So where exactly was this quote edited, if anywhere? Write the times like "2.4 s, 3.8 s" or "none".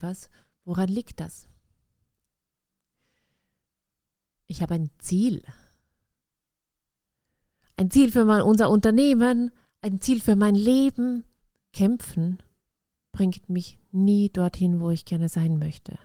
11.6 s